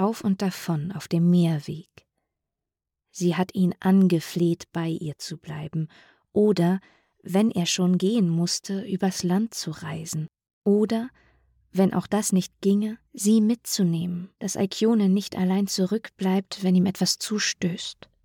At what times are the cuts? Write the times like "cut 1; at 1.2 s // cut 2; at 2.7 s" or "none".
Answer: cut 1; at 13.1 s // cut 2; at 14.4 s